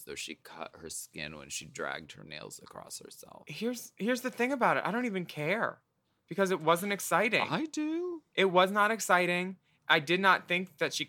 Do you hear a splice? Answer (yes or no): no